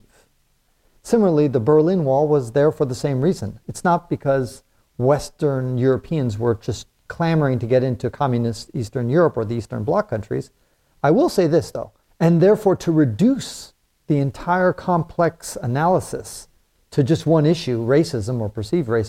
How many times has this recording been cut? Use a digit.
2